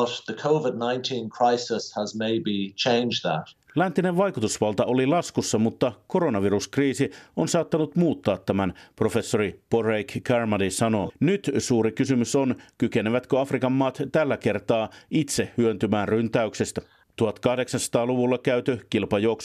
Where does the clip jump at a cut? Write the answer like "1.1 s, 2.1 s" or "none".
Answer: 11.1 s, 17.0 s